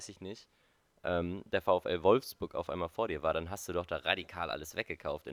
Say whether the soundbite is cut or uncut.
uncut